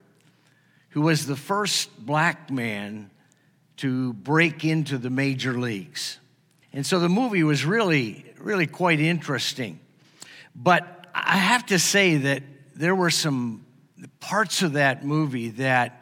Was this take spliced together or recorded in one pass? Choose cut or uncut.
cut